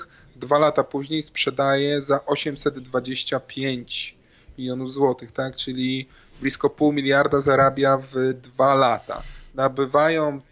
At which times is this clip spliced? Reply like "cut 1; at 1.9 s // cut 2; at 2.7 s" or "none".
none